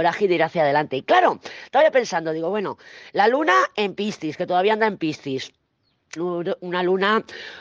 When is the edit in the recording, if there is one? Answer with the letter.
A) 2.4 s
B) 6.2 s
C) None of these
B